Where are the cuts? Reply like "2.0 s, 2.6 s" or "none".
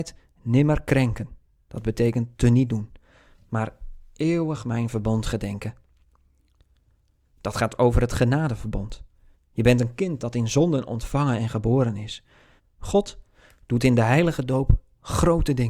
9.3 s, 12.6 s